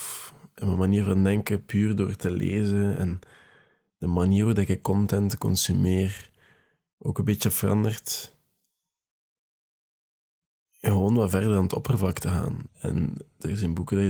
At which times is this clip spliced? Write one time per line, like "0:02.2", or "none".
0:12.7